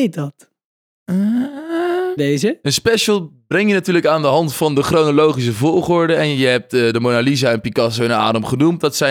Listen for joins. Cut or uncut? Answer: cut